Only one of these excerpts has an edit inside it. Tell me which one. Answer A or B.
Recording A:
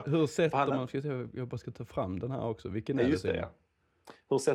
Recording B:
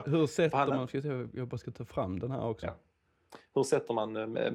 B